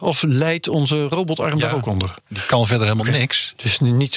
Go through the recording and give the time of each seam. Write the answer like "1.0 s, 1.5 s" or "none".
2.2 s

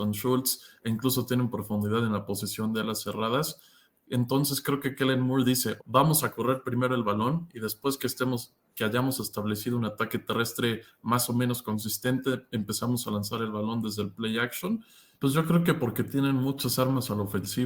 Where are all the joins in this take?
5.8 s, 15.1 s

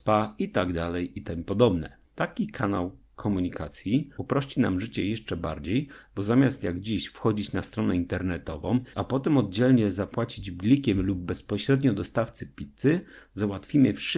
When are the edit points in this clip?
2.1 s, 8.9 s

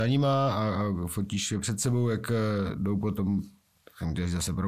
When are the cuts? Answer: none

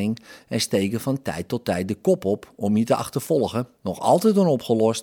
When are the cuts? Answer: 3.8 s

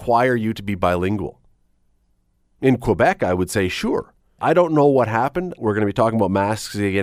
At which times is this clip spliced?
4.4 s, 5.6 s

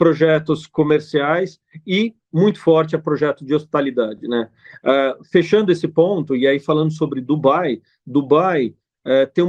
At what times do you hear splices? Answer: none

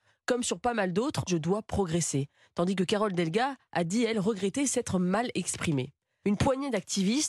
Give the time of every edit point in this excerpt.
1.3 s, 6.2 s

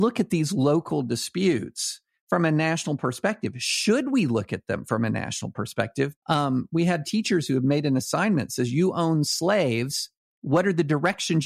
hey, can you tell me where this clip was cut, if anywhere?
6.2 s

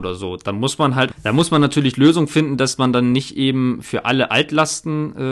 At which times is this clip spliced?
1.1 s

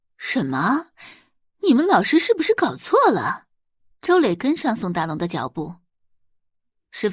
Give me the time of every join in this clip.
3.9 s

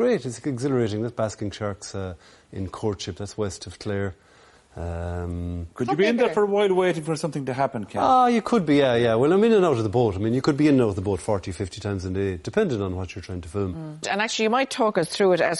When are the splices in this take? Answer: 14.0 s

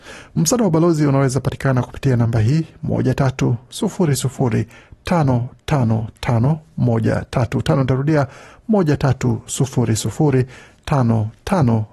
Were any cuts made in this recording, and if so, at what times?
10.8 s

